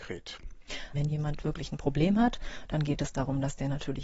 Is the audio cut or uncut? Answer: cut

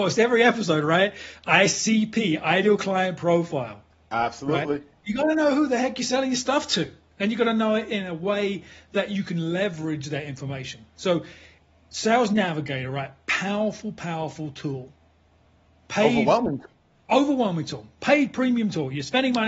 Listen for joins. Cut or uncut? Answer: uncut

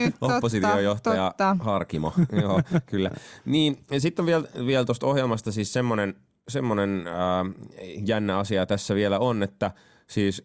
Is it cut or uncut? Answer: uncut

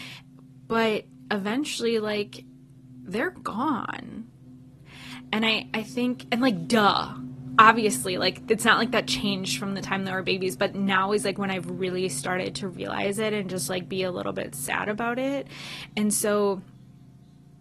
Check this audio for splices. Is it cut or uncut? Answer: uncut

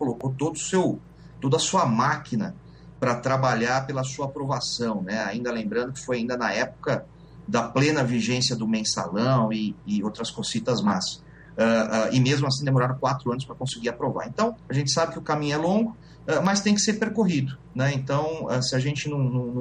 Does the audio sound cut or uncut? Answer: uncut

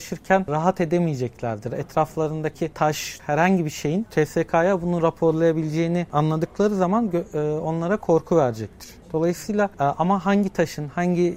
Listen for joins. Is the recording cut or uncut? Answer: cut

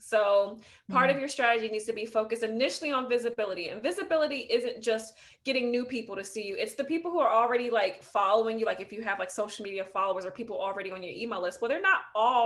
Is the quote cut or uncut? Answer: uncut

